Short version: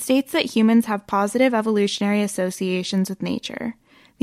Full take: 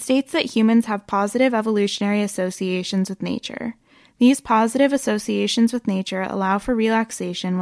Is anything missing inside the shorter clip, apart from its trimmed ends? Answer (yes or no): no